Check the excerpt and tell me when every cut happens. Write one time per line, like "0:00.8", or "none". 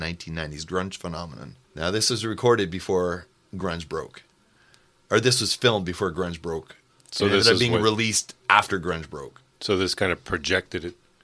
0:01.6